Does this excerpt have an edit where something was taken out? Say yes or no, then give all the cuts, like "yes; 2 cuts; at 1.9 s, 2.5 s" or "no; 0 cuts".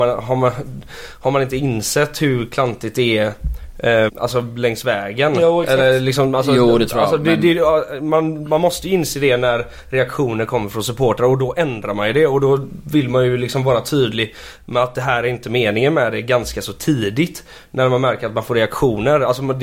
yes; 1 cut; at 4.1 s